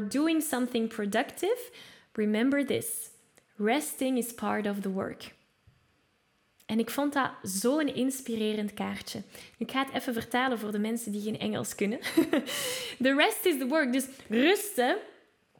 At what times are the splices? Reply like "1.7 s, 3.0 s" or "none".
none